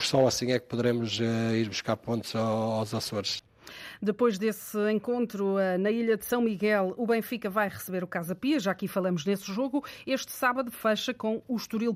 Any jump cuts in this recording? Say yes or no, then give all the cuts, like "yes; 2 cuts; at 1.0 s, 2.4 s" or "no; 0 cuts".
no; 0 cuts